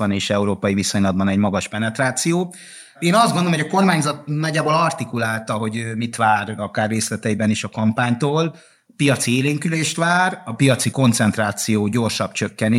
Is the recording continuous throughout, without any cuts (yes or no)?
no